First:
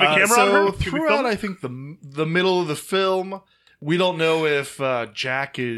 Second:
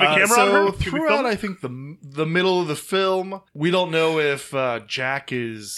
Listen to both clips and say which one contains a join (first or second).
second